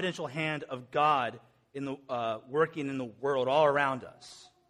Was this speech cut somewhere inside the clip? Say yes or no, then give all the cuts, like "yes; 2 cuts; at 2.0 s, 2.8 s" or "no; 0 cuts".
no; 0 cuts